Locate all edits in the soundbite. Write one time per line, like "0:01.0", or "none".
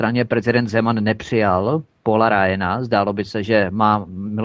none